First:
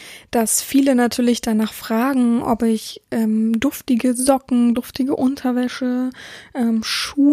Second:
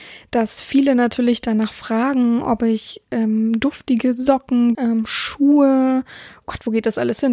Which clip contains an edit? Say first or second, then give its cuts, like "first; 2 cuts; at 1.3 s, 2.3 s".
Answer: second; 1 cut; at 4.7 s